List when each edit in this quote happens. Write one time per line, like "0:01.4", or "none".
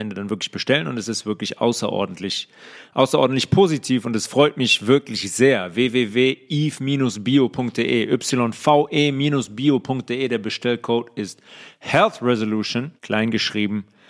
0:13.0